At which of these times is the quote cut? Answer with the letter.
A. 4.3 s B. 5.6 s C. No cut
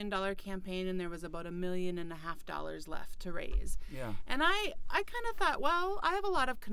C